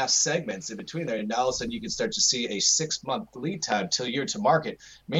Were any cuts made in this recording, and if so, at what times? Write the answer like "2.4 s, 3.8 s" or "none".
none